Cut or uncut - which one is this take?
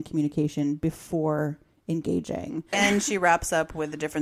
cut